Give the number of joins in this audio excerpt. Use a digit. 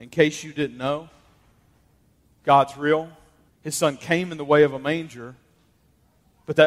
1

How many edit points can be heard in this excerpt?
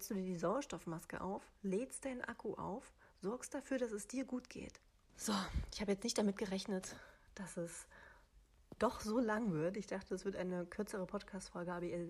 1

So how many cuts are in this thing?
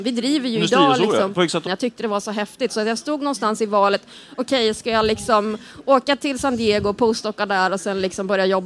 1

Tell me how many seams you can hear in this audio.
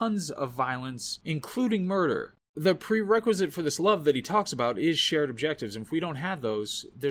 0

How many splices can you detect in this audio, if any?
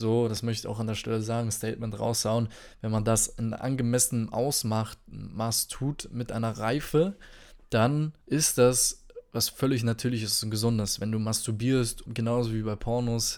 2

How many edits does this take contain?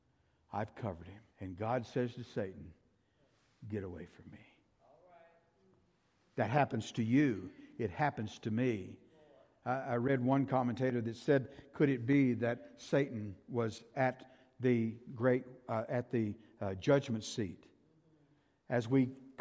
1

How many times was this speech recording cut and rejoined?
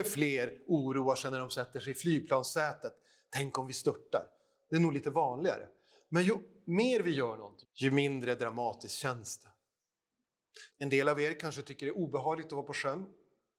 2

